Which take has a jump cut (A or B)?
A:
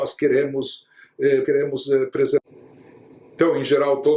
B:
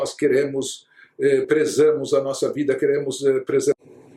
A